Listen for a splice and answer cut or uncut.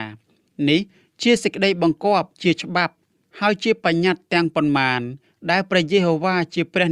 cut